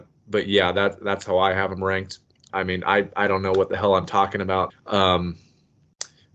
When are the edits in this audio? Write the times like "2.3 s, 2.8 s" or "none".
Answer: 2.5 s, 4.7 s